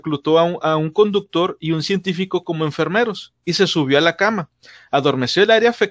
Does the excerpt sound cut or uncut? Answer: uncut